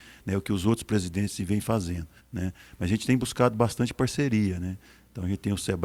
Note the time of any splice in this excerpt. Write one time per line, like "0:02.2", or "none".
0:02.2